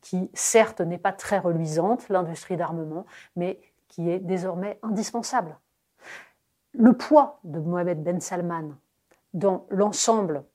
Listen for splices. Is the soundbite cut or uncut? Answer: uncut